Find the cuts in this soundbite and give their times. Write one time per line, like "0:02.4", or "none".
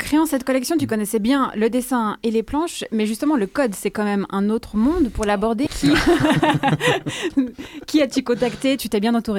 0:05.7